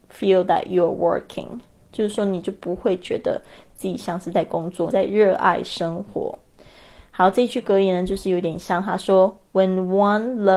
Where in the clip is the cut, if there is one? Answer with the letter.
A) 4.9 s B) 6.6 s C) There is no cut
A